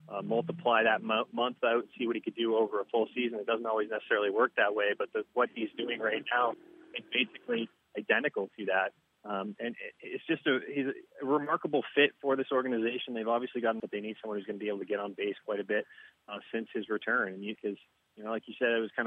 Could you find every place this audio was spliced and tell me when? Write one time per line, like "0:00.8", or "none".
0:13.8
0:16.2
0:17.6